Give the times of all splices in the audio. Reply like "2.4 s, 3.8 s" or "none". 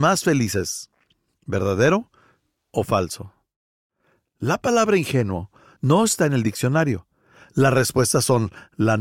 none